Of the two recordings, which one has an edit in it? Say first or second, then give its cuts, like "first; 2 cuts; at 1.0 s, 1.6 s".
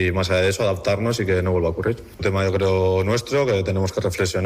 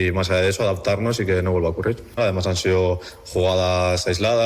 second; 1 cut; at 2.2 s